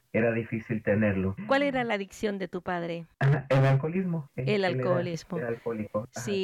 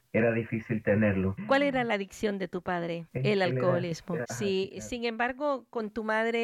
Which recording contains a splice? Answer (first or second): second